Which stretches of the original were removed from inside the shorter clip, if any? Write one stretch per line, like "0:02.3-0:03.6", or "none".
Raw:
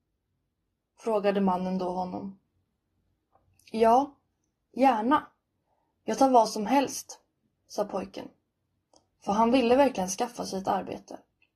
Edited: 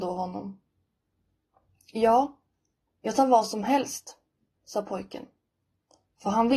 0:04.7-0:05.9